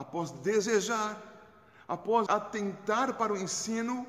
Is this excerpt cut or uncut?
cut